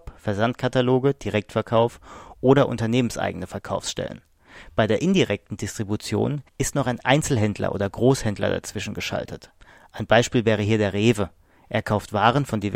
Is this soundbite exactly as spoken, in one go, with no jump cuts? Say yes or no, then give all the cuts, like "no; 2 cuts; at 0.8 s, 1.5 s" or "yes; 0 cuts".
no; 1 cut; at 6.5 s